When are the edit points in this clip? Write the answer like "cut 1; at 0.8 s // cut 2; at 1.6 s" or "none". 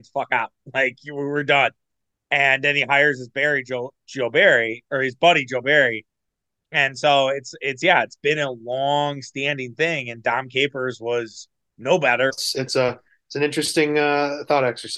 cut 1; at 12.3 s